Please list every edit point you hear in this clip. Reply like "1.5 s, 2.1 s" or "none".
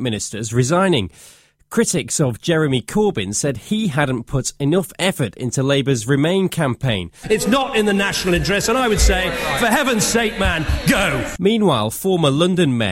7.2 s

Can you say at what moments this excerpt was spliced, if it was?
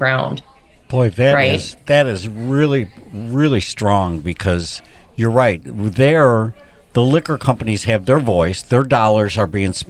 none

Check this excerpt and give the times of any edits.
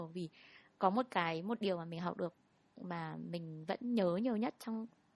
none

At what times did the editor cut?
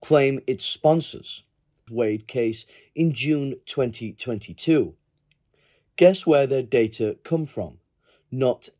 1.9 s

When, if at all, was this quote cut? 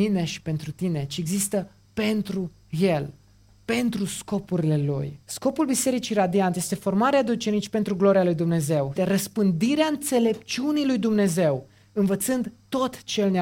5.2 s, 9.0 s

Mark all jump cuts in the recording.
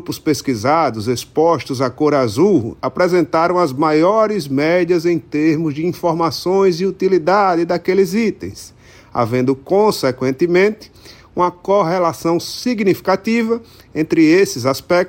none

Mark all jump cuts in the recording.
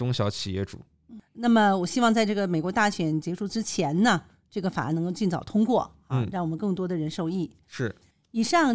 none

